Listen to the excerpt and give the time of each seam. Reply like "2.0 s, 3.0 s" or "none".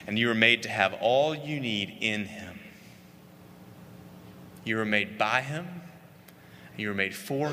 none